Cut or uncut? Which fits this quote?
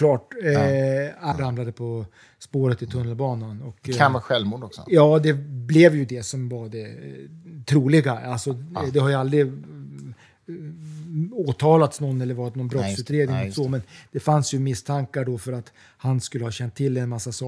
cut